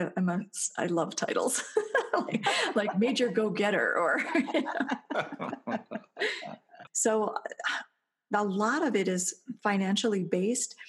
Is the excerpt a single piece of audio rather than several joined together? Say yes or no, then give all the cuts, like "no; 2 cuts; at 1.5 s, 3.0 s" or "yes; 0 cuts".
no; 1 cut; at 6.9 s